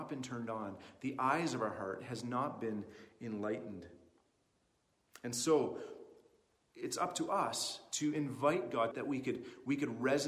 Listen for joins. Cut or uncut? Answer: cut